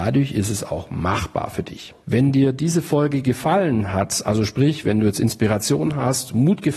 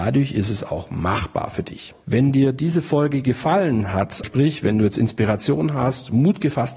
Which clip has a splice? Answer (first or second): second